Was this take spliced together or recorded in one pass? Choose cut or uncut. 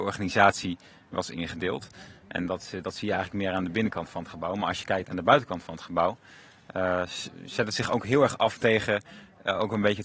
uncut